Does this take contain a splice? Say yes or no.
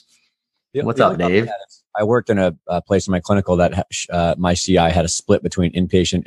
no